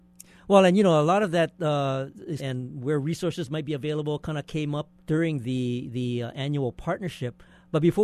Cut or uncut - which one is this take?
cut